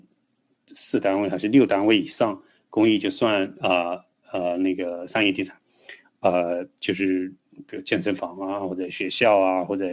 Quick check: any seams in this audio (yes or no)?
yes